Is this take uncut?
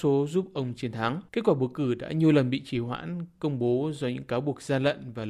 no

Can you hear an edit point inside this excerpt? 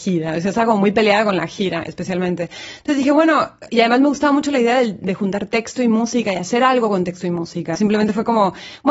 yes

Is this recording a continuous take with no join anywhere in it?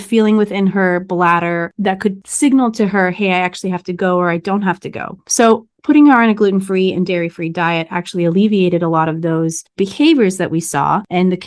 yes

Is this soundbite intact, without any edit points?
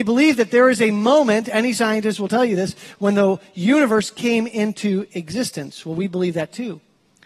yes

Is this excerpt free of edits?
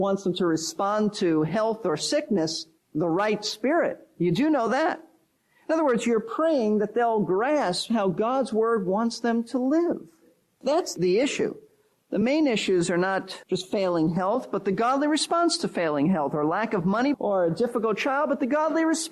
no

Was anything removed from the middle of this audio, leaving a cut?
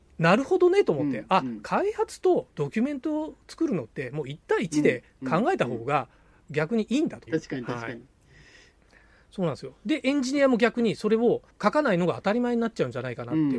yes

